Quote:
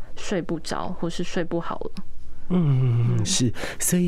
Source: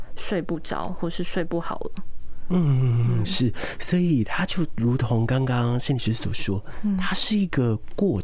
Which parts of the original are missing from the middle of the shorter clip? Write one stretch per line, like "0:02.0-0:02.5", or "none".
none